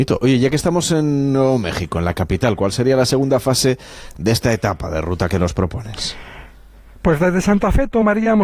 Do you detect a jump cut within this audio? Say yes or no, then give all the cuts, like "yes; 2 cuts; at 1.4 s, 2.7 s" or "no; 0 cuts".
no; 0 cuts